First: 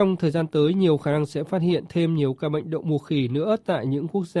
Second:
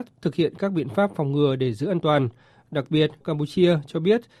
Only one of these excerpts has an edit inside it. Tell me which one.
second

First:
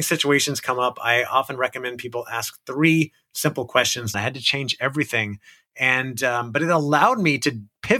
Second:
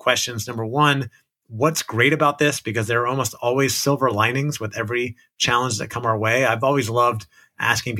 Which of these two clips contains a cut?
first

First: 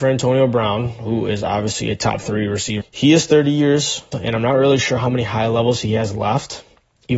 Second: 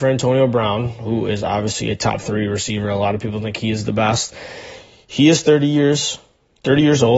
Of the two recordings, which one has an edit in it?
first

